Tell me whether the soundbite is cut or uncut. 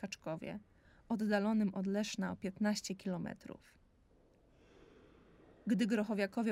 uncut